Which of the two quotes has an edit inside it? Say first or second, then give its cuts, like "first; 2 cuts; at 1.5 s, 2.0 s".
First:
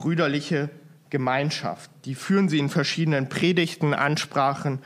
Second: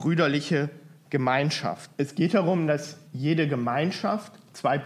second; 2 cuts; at 1.9 s, 3.1 s